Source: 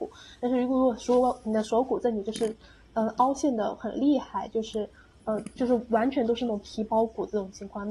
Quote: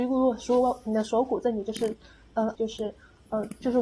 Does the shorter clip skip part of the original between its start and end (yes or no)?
yes